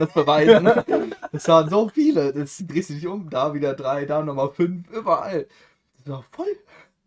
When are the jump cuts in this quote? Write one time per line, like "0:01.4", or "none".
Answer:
0:02.6